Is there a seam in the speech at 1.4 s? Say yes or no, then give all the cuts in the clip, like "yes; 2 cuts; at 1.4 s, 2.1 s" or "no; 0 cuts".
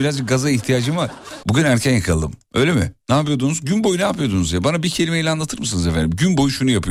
yes; 1 cut; at 1.4 s